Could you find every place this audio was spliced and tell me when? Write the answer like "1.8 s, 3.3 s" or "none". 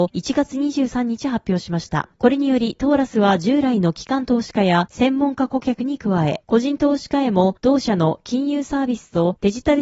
none